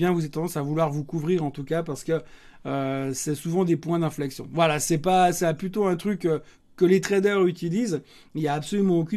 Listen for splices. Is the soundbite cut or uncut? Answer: uncut